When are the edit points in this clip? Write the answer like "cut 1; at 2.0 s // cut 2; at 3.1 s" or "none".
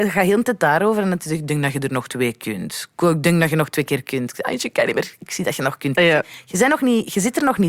cut 1; at 5.9 s